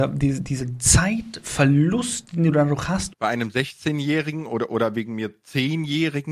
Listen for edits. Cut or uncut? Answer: cut